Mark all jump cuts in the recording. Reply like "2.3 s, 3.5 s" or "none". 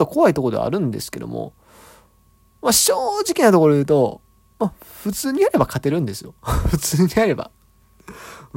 none